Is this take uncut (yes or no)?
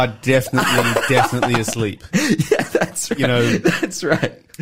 yes